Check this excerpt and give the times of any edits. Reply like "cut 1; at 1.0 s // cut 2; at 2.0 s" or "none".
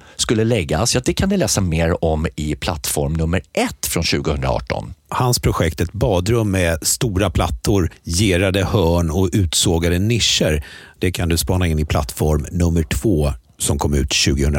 cut 1; at 5.1 s